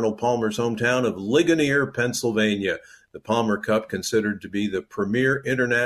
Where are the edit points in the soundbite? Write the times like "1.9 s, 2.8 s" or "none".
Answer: none

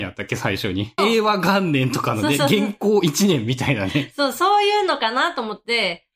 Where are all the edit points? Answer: 1.0 s

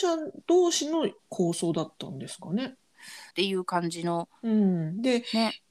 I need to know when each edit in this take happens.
3.3 s

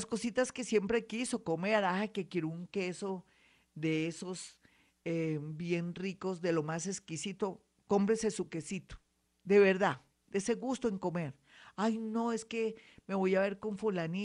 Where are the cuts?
none

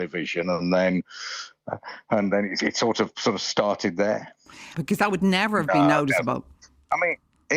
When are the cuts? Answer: 4.7 s

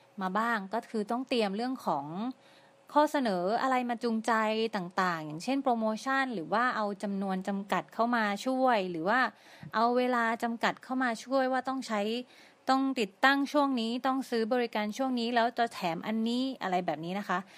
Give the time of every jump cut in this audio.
none

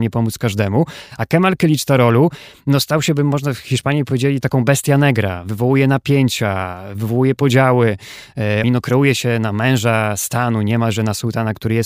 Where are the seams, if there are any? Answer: 8.6 s

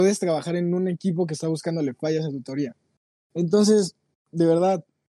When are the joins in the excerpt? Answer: 3.2 s

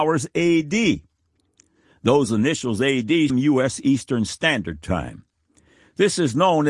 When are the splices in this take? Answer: 3.3 s

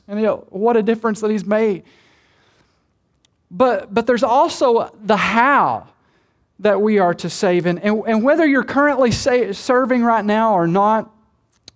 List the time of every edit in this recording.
none

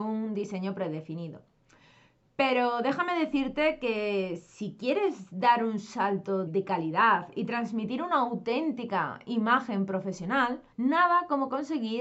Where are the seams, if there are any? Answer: 6.5 s, 10.7 s

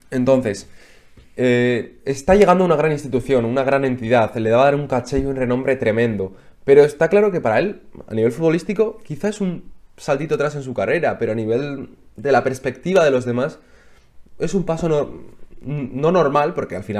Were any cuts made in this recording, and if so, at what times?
none

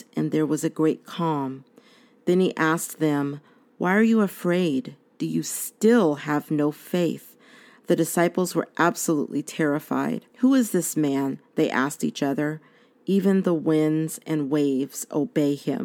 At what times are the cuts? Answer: 10.3 s

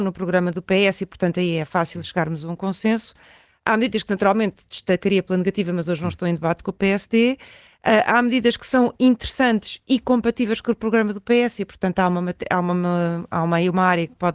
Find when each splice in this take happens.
none

